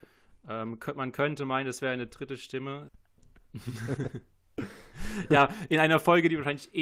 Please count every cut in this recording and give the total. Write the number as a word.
one